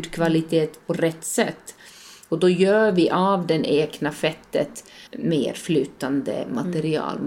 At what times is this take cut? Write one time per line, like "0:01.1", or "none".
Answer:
0:05.1